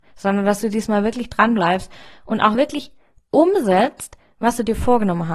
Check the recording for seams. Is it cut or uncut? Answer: uncut